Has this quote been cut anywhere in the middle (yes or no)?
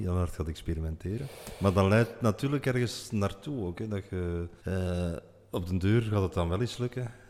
yes